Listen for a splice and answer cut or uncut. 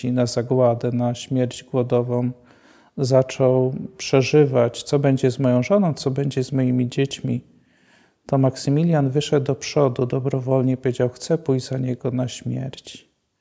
uncut